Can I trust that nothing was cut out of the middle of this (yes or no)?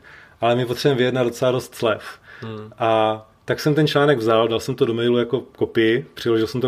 yes